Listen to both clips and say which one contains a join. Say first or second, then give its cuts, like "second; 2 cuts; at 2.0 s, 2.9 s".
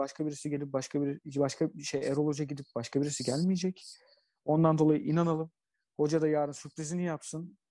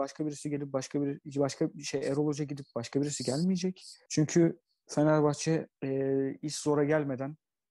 second; 2 cuts; at 4.1 s, 5.7 s